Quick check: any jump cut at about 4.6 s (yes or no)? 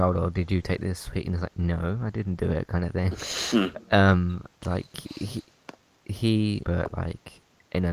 yes